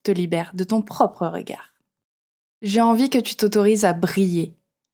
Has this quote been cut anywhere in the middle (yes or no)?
no